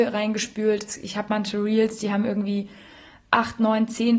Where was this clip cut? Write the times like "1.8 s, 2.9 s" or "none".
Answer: none